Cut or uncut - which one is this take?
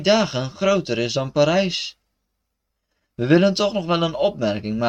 uncut